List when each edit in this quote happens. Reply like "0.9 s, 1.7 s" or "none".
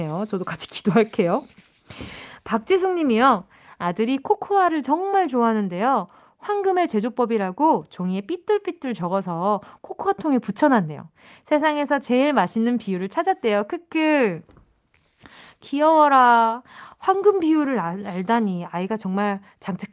none